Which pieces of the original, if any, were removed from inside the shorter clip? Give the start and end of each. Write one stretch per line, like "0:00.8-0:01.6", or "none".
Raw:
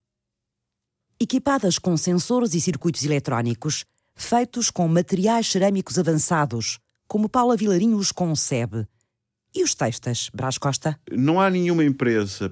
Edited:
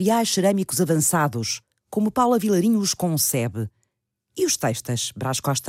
none